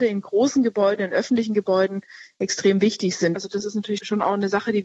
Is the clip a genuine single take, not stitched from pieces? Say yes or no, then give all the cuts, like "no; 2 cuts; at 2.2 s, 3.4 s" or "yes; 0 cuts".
no; 1 cut; at 3.4 s